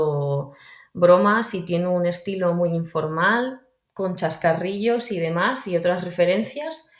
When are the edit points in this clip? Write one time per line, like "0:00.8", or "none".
none